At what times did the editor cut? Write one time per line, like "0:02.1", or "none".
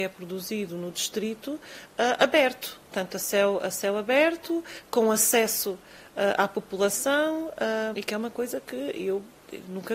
0:02.9
0:07.9